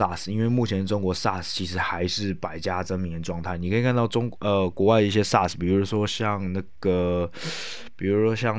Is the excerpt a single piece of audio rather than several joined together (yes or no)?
yes